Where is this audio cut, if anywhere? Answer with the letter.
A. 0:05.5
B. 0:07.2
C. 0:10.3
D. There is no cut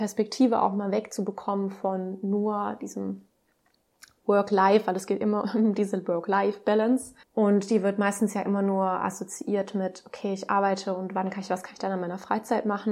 B